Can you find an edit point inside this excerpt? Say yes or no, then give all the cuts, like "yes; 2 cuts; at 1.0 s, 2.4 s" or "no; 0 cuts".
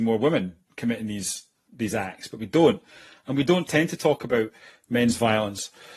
no; 0 cuts